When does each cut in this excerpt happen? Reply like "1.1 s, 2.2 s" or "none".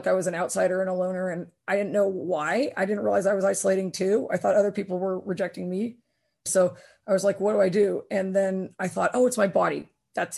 6.5 s